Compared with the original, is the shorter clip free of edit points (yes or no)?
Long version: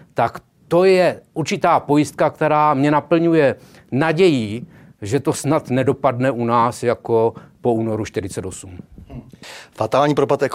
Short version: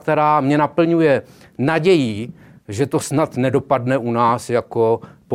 yes